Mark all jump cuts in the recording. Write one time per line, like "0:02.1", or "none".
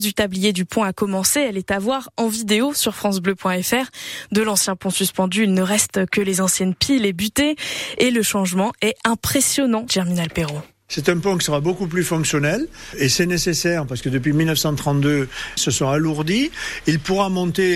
0:09.9
0:15.6